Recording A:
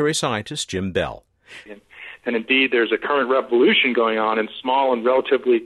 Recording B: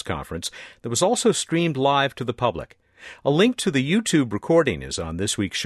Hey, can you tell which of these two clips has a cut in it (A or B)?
A